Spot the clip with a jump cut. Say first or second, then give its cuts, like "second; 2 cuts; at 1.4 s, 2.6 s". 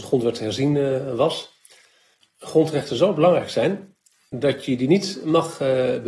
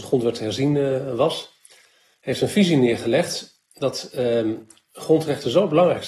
first; 1 cut; at 2.2 s